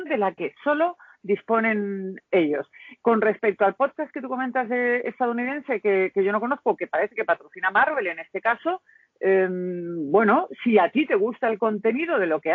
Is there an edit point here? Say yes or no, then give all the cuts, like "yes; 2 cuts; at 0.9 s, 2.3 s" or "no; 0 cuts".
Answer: no; 0 cuts